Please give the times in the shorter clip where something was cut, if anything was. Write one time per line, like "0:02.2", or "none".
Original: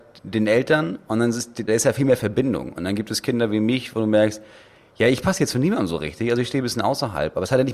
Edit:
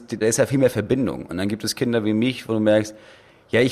none